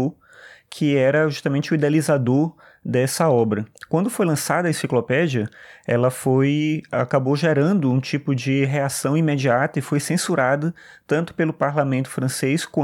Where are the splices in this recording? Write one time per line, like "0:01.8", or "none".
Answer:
none